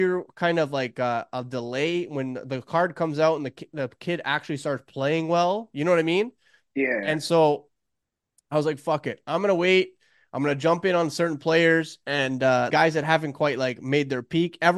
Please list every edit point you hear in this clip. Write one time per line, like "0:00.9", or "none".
0:12.7